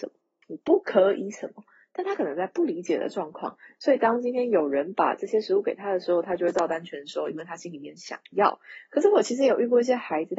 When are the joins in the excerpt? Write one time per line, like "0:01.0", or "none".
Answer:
none